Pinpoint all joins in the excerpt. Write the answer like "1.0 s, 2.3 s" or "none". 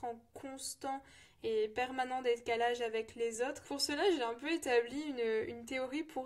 none